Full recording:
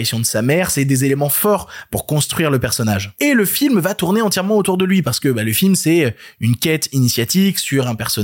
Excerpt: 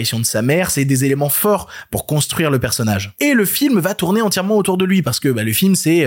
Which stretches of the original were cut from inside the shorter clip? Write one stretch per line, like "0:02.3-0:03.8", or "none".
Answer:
none